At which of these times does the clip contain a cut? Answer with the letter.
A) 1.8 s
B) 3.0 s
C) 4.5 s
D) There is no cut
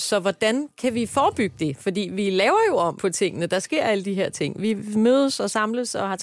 B